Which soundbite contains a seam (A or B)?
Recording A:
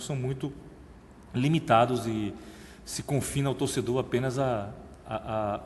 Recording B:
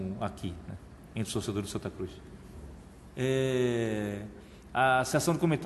B